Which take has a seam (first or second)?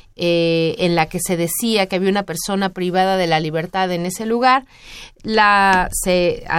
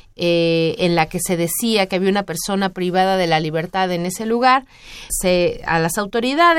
second